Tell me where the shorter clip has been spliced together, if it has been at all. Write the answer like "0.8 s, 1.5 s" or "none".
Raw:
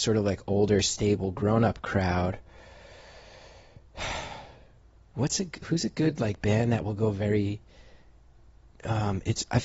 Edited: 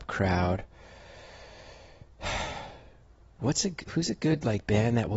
none